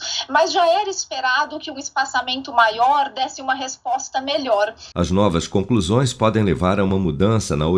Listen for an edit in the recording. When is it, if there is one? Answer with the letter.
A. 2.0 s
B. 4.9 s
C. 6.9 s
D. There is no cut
B